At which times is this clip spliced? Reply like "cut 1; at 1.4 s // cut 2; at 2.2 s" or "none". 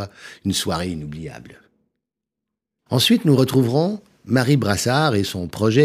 cut 1; at 2.9 s